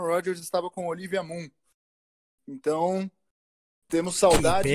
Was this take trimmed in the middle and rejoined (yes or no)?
no